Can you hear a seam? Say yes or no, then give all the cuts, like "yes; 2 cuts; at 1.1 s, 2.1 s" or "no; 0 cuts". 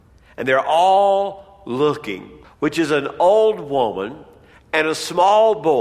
yes; 1 cut; at 2.4 s